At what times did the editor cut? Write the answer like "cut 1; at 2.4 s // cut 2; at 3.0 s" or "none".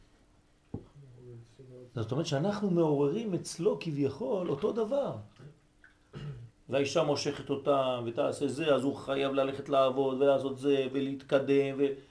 cut 1; at 6.5 s